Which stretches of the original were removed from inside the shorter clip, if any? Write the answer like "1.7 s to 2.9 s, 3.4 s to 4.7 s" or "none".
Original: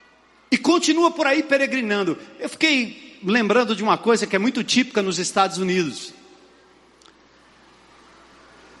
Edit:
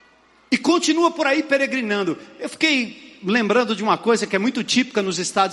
none